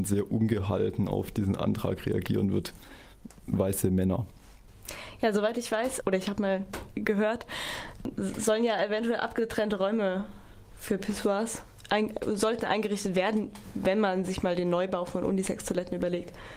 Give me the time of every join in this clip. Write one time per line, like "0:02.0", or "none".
0:06.0